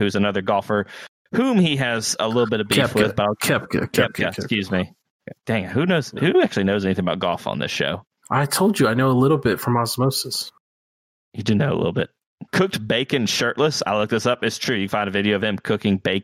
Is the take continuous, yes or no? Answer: yes